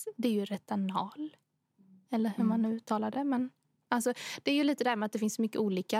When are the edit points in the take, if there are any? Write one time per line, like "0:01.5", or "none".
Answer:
none